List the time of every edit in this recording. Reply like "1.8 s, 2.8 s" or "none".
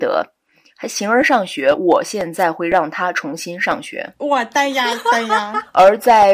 none